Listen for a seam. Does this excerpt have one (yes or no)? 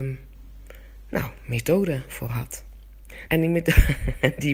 yes